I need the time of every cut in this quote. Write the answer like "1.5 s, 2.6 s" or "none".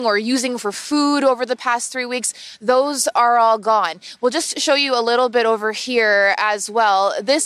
none